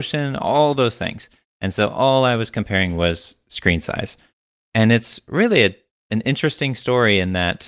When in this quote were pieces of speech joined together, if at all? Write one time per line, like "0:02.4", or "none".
0:04.6